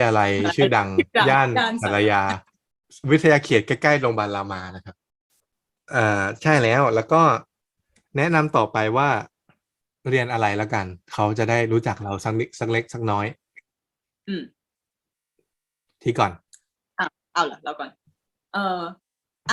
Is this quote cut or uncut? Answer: uncut